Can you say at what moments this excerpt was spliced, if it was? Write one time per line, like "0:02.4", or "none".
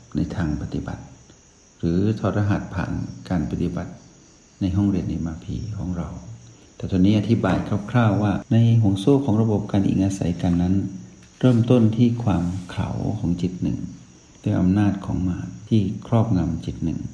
none